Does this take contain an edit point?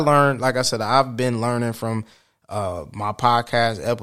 no; 0 cuts

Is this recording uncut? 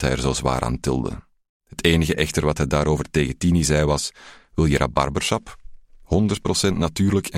yes; 0 cuts

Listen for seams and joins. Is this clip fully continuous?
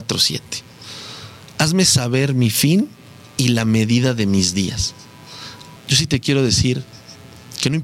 no; 1 cut; at 5.8 s

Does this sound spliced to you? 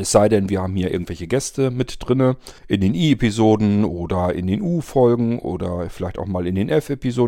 yes; 1 cut; at 2.6 s

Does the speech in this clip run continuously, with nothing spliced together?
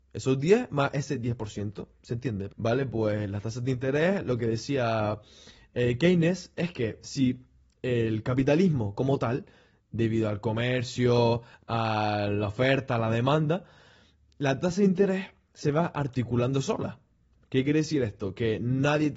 no; 1 cut; at 2.5 s

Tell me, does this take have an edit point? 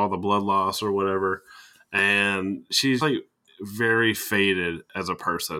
yes; 1 cut; at 3.0 s

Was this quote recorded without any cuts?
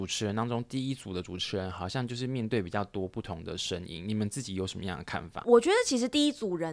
yes; 0 cuts

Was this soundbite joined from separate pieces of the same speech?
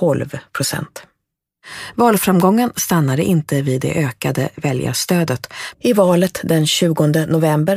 yes; 1 cut; at 5.7 s

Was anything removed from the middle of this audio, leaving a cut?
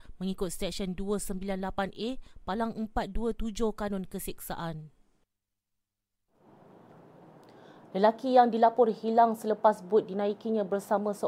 no; 0 cuts

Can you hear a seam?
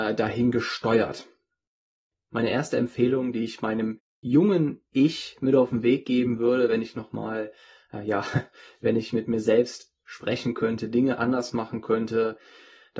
no; 0 cuts

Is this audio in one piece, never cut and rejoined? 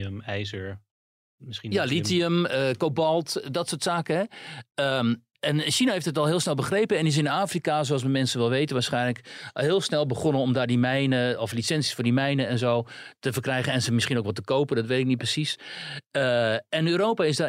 yes; 0 cuts

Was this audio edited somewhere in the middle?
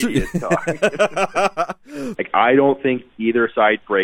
yes; 1 cut; at 2.1 s

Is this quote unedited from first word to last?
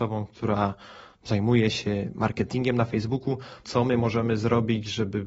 no; 1 cut; at 3.6 s

